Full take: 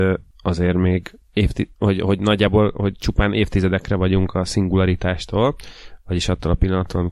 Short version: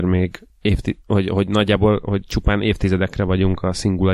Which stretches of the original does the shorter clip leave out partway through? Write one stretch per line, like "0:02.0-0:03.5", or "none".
none